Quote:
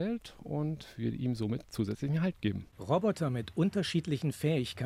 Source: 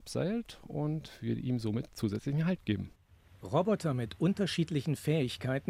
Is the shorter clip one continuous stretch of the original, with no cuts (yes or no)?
no